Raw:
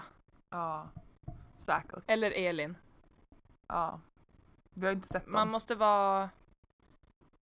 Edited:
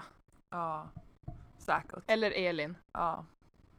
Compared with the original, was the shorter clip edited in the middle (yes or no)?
yes